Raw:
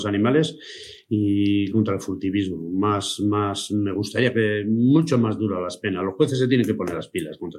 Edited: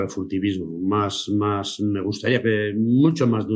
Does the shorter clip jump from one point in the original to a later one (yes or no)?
no